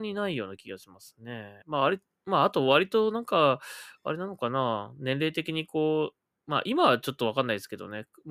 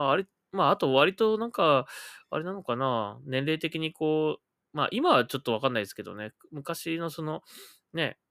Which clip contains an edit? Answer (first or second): first